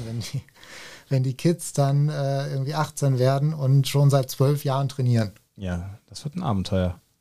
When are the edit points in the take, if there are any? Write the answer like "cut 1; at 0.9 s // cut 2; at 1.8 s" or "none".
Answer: none